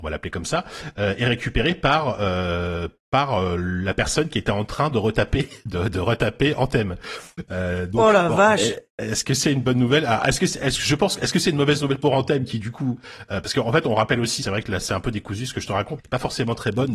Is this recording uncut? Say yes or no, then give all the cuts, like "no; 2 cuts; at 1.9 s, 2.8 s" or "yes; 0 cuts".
no; 2 cuts; at 14.4 s, 16.0 s